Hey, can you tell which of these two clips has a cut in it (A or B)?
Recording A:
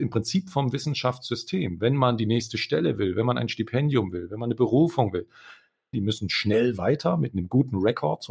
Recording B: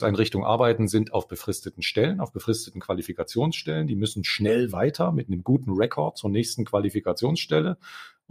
A